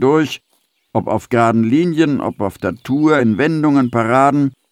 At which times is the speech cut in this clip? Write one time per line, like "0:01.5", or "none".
none